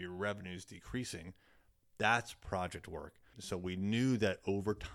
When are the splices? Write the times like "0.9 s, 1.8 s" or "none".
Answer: 3.3 s